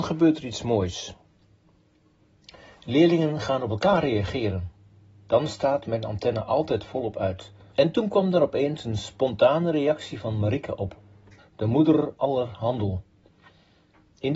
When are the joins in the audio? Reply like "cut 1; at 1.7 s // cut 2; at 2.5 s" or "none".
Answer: cut 1; at 7.7 s // cut 2; at 11.4 s